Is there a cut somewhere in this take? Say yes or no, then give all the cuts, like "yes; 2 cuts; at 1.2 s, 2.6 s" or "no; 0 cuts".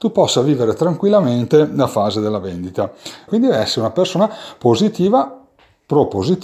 yes; 1 cut; at 3.3 s